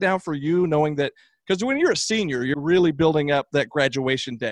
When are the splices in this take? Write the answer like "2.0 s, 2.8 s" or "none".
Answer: 2.5 s

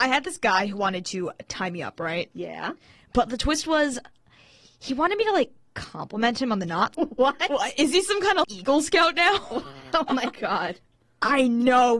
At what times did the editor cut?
6.9 s, 8.4 s

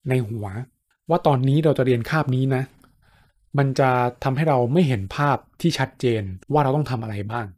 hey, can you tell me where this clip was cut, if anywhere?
6.4 s

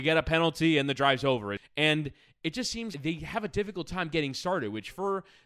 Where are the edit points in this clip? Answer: 1.6 s, 2.9 s

